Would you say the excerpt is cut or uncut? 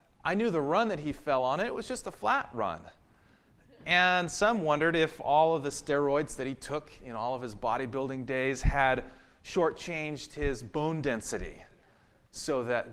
uncut